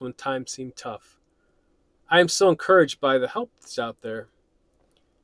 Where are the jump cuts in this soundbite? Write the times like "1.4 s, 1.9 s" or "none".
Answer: 2.0 s